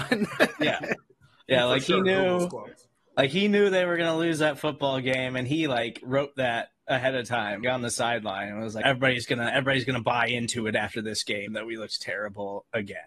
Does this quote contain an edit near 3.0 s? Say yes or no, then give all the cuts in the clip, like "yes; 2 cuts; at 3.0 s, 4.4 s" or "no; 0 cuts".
no; 3 cuts; at 7.6 s, 8.8 s, 11.5 s